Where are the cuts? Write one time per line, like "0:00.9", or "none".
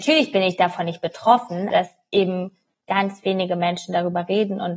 0:01.7